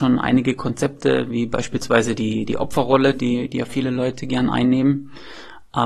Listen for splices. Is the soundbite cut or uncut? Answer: uncut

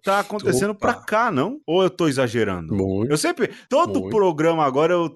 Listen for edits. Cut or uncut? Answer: uncut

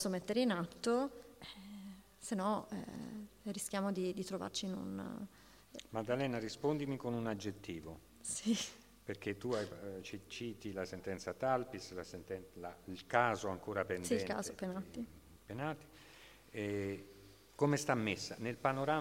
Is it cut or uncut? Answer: uncut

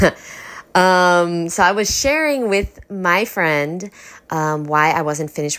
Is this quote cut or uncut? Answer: uncut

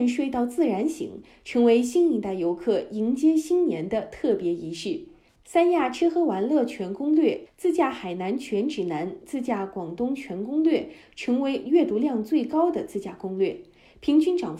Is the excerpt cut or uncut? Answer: cut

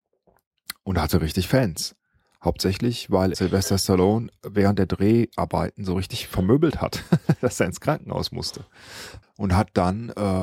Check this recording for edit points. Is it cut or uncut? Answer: cut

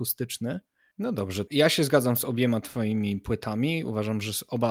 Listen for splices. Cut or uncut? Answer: cut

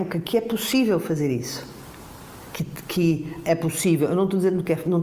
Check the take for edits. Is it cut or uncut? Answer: uncut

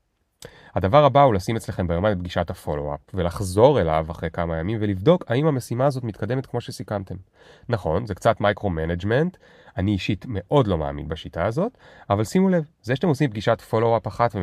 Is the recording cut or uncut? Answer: uncut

